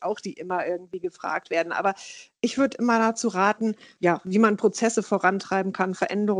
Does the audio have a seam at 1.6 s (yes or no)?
no